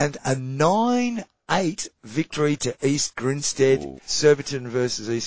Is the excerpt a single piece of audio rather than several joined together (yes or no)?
no